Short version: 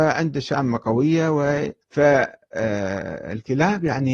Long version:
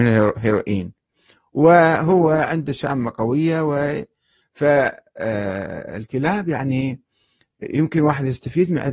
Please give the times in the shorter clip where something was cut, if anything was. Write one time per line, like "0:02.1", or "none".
0:01.8